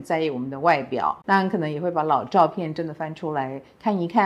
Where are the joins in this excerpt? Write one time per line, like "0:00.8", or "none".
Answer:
0:01.2